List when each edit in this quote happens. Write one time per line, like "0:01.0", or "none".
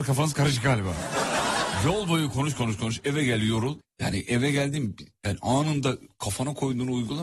0:02.6
0:03.8